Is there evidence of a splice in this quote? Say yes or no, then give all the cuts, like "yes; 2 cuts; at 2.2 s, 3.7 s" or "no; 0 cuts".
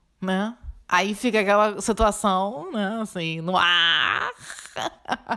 no; 0 cuts